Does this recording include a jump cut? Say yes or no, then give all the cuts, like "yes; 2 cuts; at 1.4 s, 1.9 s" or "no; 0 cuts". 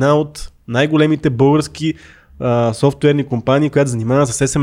no; 0 cuts